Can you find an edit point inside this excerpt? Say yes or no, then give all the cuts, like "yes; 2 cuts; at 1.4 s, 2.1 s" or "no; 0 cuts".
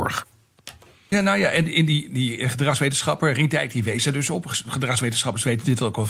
no; 0 cuts